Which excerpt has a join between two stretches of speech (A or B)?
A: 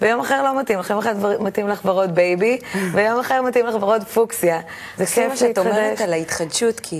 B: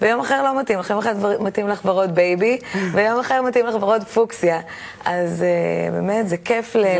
A